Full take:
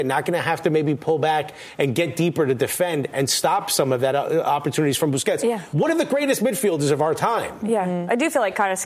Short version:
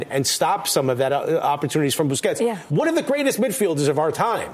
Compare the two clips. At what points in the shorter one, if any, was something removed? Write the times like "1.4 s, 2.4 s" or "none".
none